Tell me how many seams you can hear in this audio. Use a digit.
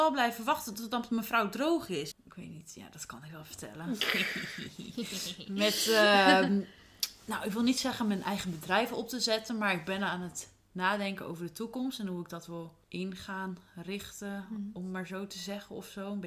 2